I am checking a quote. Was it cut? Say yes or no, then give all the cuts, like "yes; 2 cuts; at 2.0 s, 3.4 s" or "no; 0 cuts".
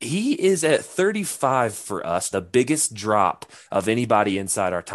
yes; 1 cut; at 2.3 s